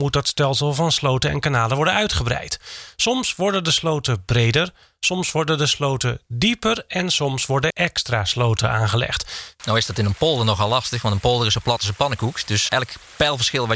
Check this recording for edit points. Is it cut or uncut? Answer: cut